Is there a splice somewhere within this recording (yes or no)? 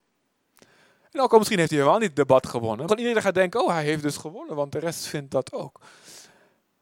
yes